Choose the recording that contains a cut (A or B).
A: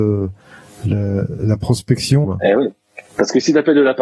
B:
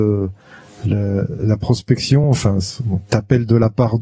A